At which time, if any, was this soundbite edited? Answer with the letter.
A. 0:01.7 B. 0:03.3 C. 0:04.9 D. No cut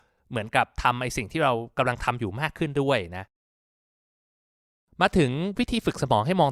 D